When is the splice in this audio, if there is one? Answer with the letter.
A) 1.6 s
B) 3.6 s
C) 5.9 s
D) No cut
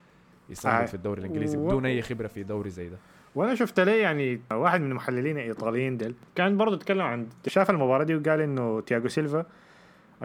D